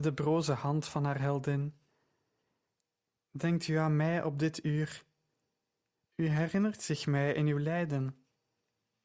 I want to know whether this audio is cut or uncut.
uncut